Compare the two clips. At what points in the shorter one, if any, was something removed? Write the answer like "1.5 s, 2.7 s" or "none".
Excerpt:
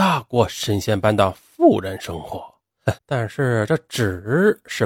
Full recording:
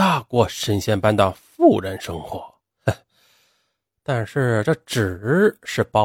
3.0 s